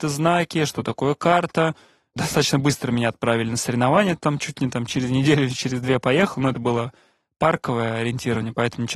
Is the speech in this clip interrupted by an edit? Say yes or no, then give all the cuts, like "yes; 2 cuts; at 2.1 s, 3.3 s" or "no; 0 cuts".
no; 0 cuts